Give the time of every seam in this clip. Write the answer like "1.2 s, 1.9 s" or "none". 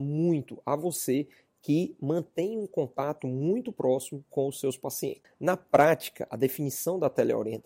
5.2 s